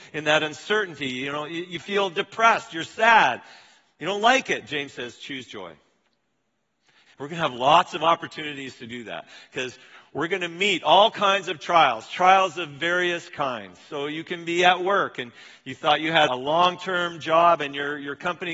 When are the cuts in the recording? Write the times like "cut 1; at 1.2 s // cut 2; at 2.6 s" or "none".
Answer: cut 1; at 7.1 s // cut 2; at 16.3 s